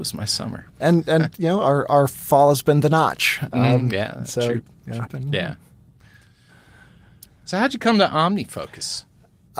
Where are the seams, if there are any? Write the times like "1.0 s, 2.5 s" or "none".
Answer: 5.1 s